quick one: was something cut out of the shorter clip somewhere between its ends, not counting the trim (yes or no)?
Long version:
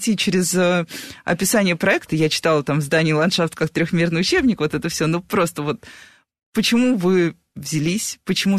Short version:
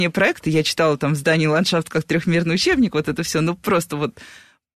no